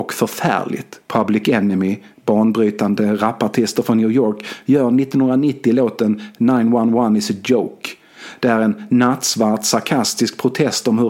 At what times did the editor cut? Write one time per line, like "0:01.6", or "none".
0:01.0